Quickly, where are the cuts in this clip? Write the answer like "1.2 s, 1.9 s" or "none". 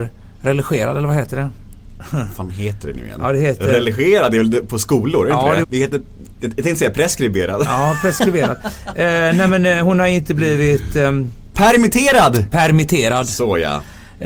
5.6 s

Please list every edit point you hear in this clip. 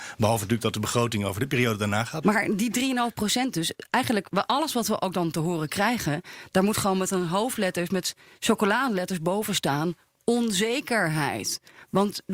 2.2 s

